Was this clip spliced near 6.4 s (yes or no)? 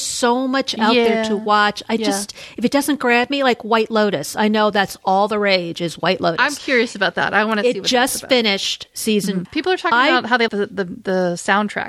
no